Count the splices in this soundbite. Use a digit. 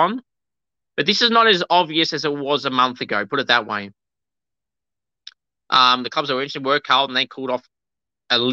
0